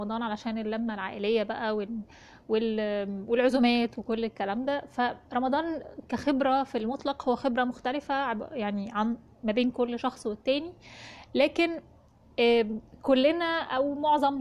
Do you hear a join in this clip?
no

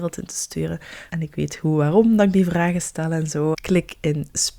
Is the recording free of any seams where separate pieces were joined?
no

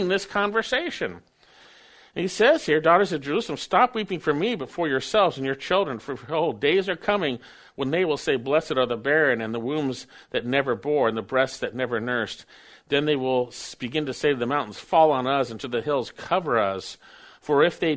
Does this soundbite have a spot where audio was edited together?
no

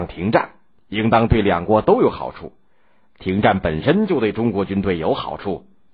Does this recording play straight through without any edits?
yes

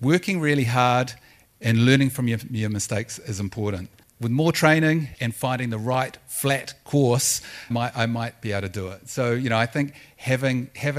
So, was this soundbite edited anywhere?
yes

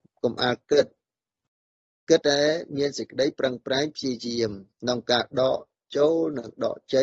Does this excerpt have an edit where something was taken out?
yes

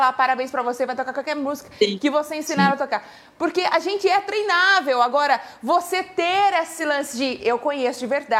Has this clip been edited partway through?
yes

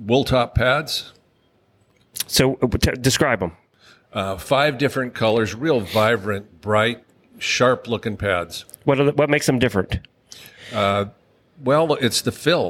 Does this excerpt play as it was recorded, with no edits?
yes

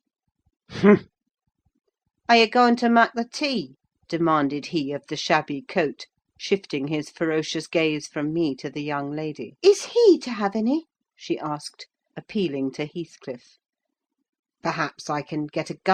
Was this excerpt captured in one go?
no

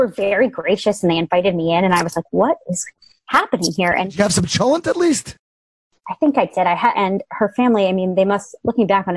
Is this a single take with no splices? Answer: no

